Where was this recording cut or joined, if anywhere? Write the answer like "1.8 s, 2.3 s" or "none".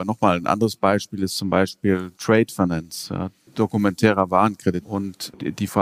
4.8 s